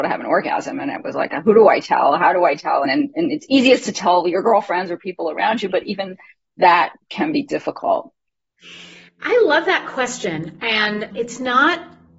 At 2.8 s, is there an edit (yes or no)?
yes